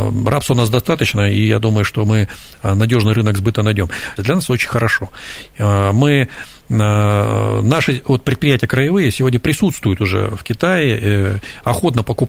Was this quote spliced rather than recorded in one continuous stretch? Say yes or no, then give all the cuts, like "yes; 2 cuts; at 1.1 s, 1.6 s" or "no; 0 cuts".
yes; 1 cut; at 4.2 s